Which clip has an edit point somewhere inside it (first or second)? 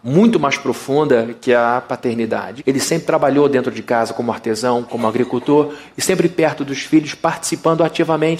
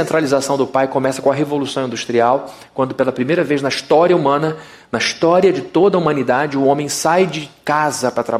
first